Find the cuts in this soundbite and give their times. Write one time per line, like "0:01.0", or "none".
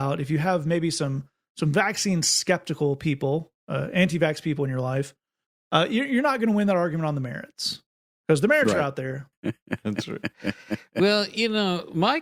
0:09.3